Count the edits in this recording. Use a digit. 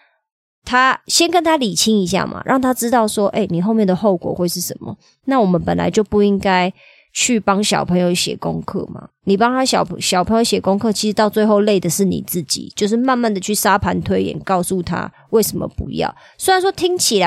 0